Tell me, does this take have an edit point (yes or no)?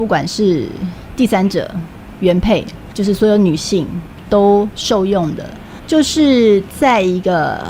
no